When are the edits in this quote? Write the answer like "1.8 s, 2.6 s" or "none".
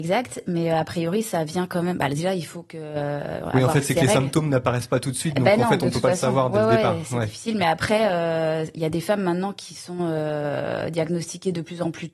none